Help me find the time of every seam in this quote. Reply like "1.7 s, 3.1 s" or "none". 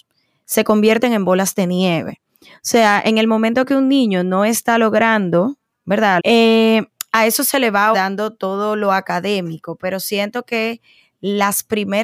6.2 s, 7.9 s